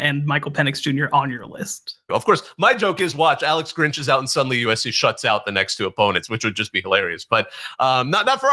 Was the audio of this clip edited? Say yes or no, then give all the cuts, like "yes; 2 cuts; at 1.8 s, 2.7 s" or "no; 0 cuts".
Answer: yes; 1 cut; at 2.1 s